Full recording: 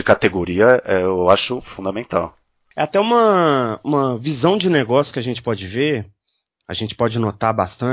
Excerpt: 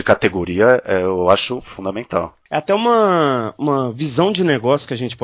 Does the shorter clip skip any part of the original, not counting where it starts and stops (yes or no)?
yes